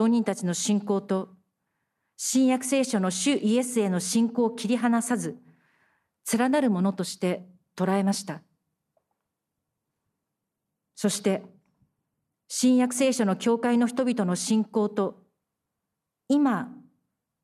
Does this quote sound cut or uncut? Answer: uncut